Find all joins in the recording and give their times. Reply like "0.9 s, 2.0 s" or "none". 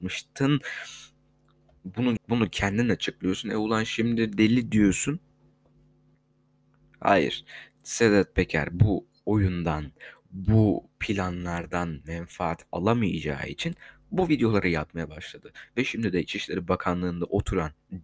2.2 s